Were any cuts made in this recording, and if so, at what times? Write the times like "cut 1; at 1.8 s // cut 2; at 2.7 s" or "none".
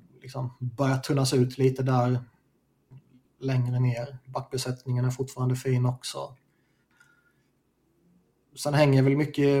none